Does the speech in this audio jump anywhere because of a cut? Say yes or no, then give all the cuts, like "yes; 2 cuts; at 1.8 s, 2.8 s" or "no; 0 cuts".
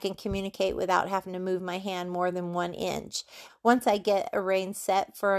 yes; 1 cut; at 3.5 s